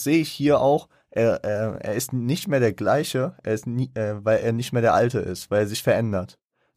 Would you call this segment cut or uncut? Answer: uncut